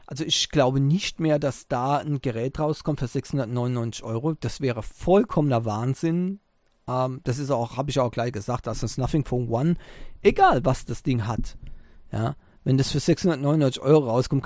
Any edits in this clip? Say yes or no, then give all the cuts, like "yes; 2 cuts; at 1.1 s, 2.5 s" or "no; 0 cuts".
no; 0 cuts